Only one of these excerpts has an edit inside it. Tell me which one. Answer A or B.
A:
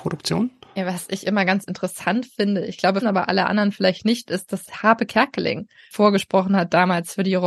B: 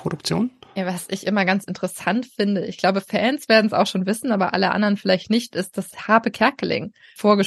A